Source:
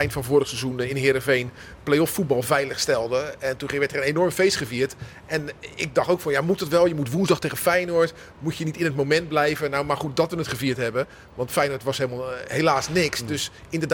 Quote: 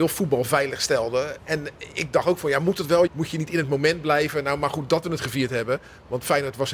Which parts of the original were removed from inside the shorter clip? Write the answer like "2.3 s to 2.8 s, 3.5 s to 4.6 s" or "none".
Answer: 3.4 s to 5.2 s, 6.9 s to 8.3 s